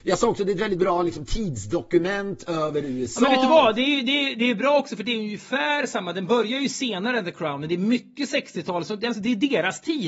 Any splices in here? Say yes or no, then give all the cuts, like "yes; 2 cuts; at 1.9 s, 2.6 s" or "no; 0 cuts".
no; 0 cuts